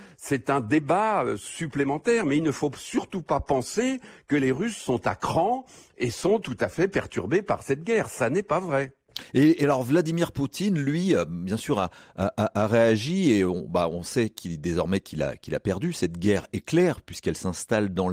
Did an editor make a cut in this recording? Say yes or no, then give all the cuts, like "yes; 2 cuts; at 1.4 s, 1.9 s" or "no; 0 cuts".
no; 0 cuts